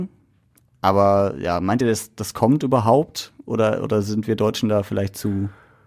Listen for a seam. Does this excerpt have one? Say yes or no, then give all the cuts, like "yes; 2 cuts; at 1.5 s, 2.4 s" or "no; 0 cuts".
no; 0 cuts